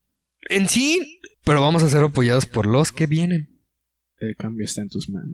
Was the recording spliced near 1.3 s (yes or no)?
yes